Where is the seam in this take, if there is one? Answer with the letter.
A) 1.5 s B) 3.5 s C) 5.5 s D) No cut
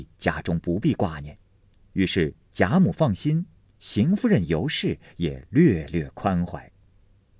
D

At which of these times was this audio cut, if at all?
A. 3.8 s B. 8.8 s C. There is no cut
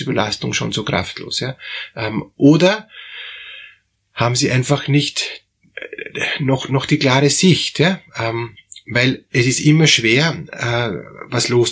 C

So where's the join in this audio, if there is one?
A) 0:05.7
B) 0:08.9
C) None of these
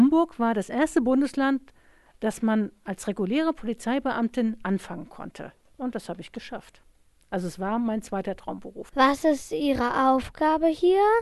C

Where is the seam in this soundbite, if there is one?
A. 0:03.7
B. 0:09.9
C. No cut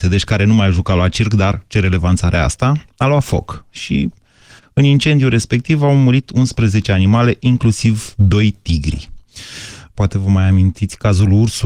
B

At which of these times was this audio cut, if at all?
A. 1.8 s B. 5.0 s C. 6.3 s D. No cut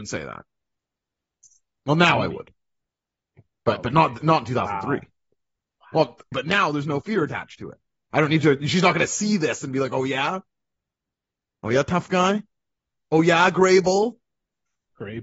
C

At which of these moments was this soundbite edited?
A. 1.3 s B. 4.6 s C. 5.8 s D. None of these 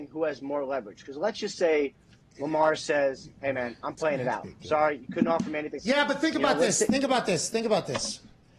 C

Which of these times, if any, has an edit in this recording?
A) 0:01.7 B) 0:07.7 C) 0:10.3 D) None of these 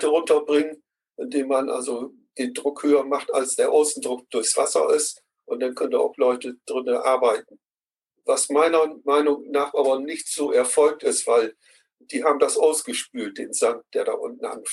D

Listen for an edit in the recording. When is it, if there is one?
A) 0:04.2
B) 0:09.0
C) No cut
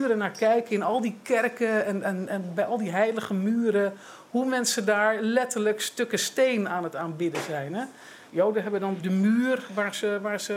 B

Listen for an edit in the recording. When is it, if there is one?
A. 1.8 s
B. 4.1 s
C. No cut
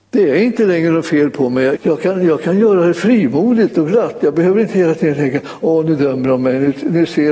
A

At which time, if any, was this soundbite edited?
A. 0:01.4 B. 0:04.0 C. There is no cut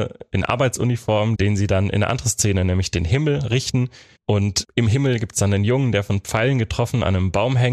A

